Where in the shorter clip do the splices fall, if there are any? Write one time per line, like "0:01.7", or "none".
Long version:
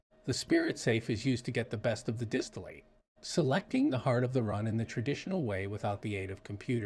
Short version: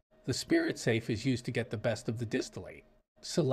none